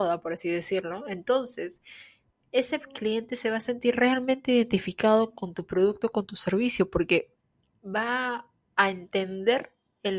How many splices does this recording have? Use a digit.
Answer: 0